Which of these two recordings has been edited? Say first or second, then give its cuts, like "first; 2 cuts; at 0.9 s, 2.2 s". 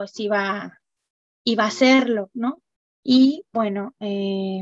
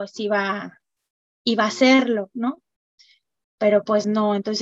first; 1 cut; at 2.8 s